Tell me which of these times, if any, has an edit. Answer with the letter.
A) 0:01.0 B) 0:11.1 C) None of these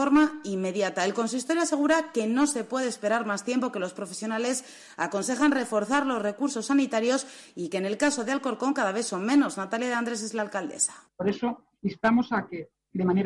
B